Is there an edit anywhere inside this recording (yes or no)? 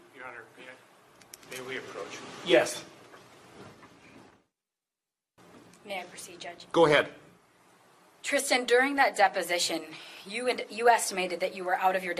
no